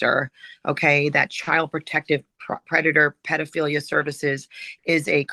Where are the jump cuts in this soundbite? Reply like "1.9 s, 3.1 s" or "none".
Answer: none